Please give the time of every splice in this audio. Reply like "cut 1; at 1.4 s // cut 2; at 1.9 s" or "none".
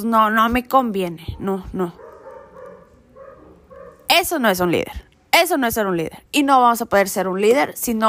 none